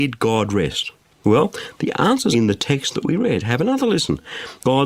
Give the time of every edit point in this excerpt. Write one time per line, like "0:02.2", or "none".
0:02.3